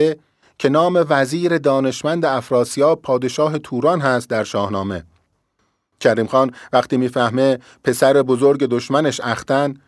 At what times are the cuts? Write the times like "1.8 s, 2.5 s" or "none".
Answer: 6.0 s